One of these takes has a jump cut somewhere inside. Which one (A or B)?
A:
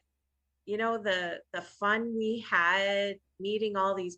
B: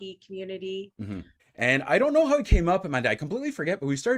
B